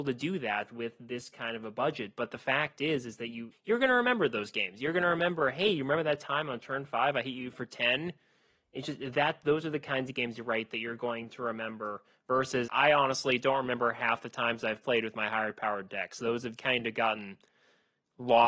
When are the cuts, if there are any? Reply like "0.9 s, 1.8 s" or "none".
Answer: 3.5 s, 12.7 s, 16.6 s